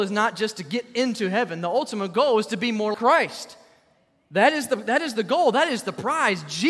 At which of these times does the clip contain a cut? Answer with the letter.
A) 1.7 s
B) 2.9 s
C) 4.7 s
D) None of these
B